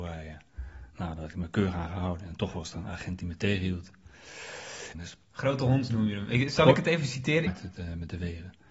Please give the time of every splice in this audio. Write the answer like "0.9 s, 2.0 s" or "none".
4.9 s, 7.5 s